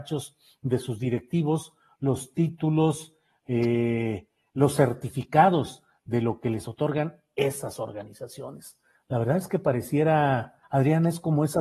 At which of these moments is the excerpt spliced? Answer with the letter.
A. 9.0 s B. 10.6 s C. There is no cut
B